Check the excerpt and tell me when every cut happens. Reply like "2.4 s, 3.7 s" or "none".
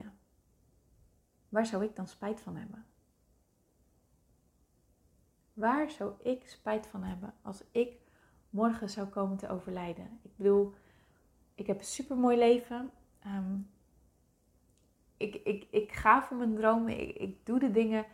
none